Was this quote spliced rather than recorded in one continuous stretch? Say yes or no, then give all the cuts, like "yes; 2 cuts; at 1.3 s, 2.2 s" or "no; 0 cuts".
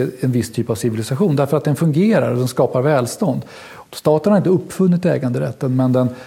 yes; 1 cut; at 3.9 s